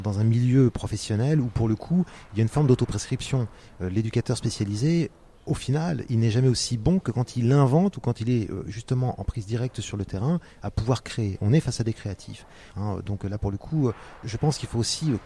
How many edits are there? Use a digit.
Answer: 2